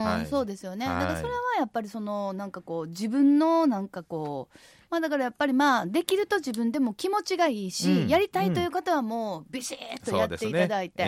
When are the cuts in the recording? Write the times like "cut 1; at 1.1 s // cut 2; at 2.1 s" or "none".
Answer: cut 1; at 4.8 s